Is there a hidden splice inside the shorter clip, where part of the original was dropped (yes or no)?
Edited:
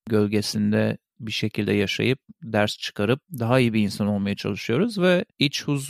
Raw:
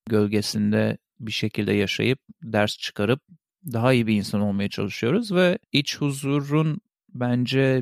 yes